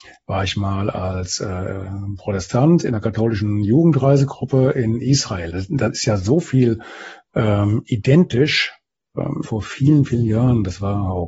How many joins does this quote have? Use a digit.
2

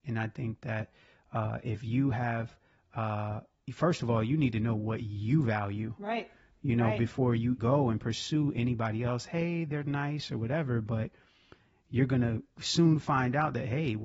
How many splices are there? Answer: 1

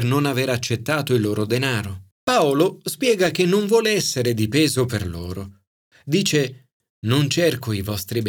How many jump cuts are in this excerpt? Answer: 1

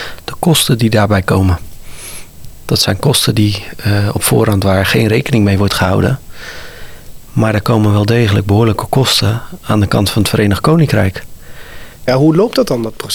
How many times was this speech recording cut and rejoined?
1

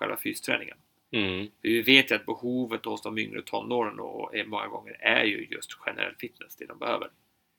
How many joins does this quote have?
0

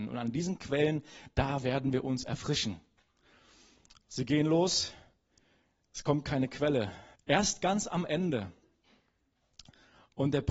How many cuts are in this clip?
1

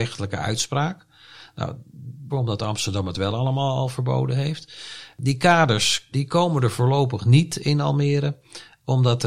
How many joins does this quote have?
2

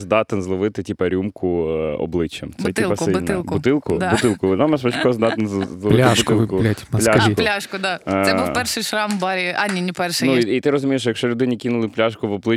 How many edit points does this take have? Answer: 0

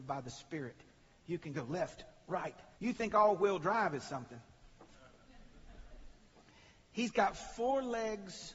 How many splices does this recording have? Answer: 1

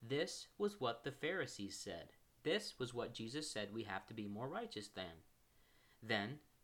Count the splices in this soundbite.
1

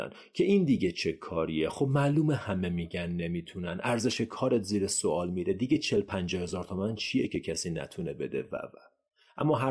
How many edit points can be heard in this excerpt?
1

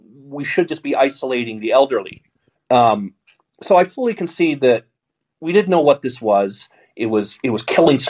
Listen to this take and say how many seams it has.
1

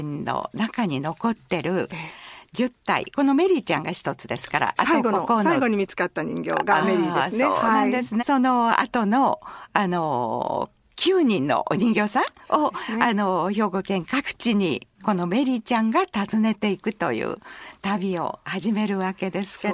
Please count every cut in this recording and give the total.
1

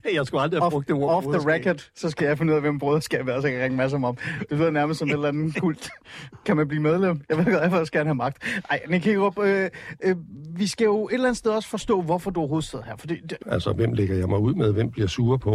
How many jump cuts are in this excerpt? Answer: 1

